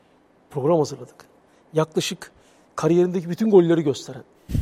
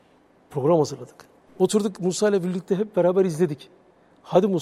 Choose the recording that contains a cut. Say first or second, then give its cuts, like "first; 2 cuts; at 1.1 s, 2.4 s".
second; 1 cut; at 1.5 s